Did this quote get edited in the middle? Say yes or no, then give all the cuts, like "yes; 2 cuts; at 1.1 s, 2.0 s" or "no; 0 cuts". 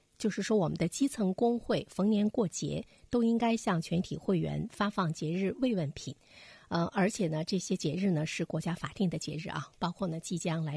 no; 0 cuts